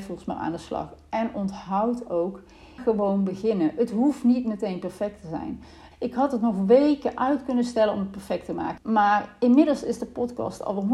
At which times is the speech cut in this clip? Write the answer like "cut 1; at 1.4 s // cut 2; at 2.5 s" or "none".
cut 1; at 2.8 s // cut 2; at 5.9 s // cut 3; at 8.8 s